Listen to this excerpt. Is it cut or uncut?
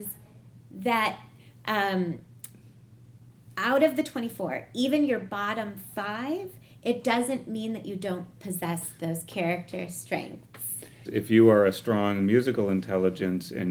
cut